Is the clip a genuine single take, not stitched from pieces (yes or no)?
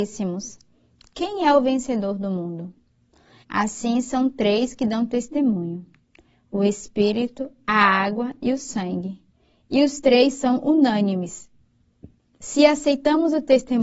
no